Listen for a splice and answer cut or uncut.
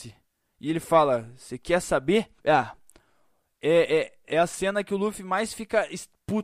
cut